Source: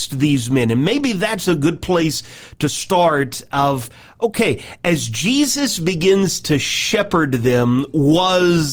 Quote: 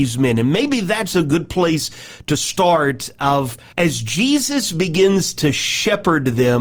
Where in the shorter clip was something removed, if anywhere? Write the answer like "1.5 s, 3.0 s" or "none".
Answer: 3.7 s